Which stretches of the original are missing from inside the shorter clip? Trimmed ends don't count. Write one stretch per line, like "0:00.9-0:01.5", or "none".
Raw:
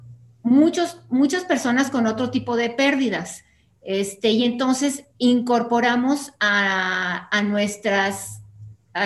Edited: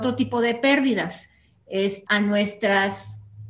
0:04.2-0:07.3